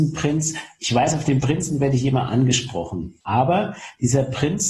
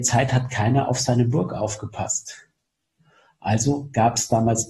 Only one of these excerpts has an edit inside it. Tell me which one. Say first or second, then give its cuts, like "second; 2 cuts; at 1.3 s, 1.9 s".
first; 1 cut; at 3.2 s